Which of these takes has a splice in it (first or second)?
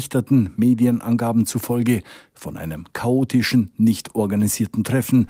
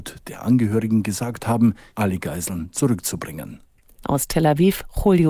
second